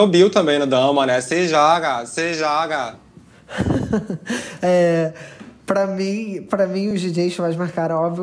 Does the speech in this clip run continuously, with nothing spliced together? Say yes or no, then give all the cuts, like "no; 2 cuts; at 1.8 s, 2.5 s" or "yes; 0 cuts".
yes; 0 cuts